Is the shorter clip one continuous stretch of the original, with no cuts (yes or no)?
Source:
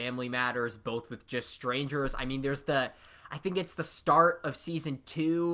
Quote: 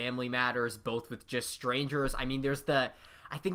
yes